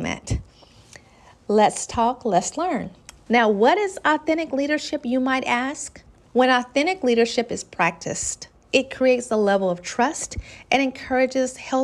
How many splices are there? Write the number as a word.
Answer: two